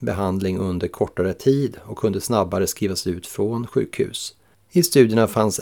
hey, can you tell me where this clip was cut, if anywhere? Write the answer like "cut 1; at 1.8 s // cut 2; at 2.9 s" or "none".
cut 1; at 4.5 s